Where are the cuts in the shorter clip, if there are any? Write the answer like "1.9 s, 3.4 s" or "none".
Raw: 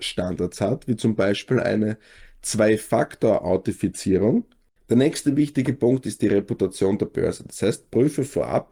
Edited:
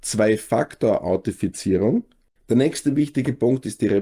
none